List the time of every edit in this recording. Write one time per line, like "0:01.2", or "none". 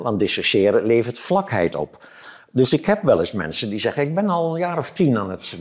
none